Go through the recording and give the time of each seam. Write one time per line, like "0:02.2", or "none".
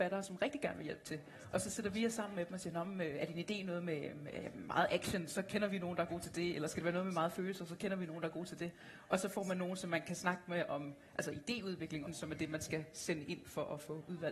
0:12.1